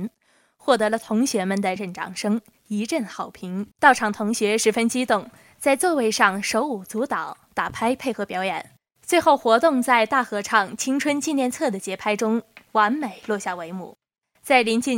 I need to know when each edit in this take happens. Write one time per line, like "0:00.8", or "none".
0:01.8
0:03.7